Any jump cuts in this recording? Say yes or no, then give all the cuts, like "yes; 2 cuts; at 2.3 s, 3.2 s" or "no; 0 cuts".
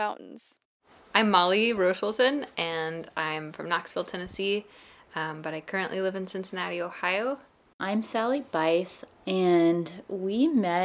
yes; 1 cut; at 9.1 s